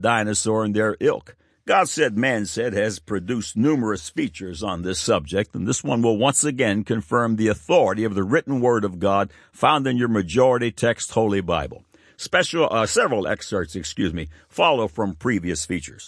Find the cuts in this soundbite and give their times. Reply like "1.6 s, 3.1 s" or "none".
1.5 s

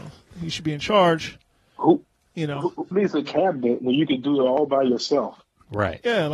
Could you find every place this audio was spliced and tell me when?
2.9 s

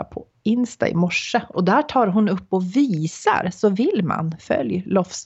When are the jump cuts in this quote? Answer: 1.5 s

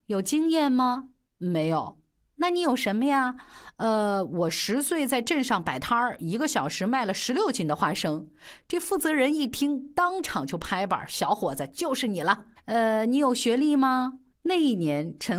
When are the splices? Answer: 12.6 s, 14.3 s

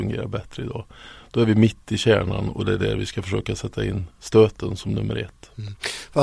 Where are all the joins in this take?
none

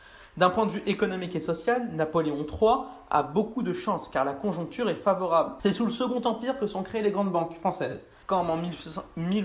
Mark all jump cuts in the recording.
5.6 s, 8.2 s

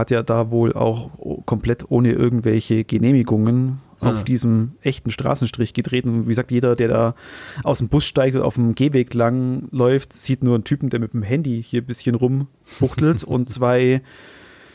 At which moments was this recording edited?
none

